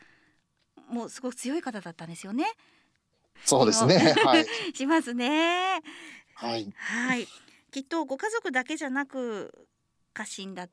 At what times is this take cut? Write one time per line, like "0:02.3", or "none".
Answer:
0:03.4